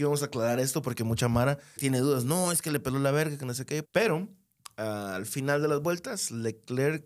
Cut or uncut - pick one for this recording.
cut